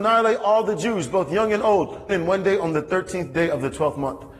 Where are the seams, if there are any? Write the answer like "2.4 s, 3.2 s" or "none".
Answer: 2.1 s